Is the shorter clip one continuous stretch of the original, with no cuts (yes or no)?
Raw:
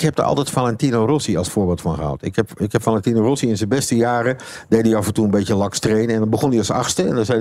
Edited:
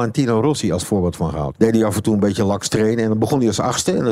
no